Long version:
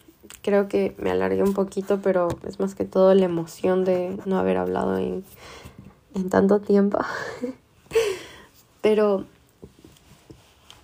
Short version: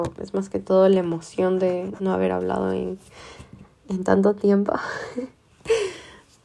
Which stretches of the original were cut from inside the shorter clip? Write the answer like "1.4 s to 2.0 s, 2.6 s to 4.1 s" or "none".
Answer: none